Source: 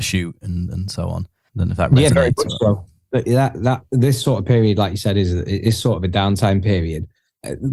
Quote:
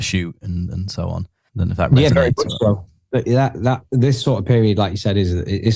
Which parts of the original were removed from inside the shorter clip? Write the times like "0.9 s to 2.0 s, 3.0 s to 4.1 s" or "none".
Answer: none

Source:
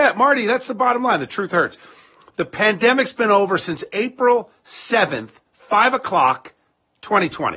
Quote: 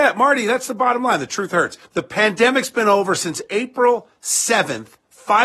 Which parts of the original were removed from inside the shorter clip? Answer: 1.8 s to 2.3 s

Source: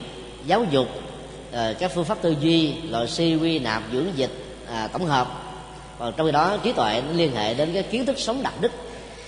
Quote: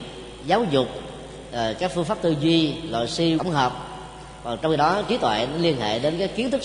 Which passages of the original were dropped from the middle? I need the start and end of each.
3.4 s to 4.9 s

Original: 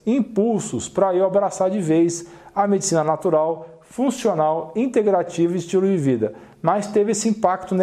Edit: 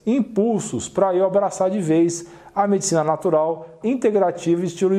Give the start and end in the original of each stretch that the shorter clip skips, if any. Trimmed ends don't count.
3.8 s to 4.7 s

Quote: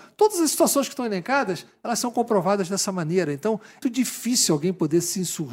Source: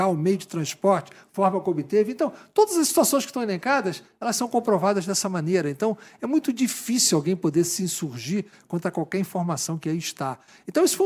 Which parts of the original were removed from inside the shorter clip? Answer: 6.2 s to 6.5 s

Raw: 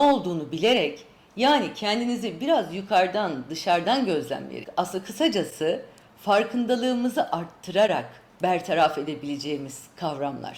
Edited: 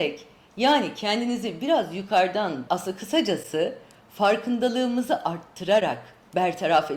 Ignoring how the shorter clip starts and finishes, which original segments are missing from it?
3.5 s to 4.7 s

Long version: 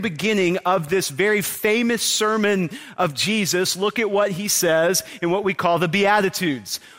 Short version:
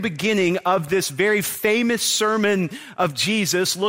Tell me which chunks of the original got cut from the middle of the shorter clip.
none

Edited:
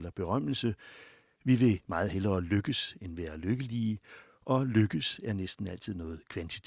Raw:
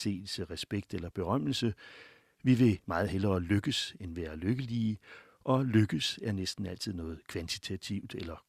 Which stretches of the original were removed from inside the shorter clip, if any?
none

